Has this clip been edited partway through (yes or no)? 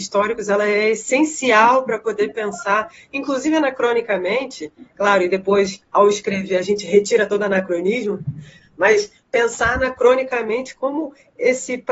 no